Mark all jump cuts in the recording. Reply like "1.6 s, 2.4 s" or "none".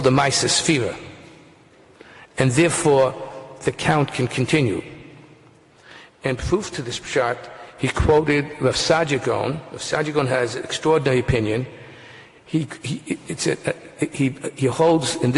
none